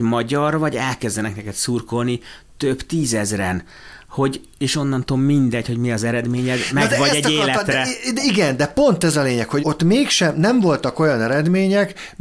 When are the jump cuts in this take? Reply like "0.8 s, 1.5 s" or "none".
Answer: 9.6 s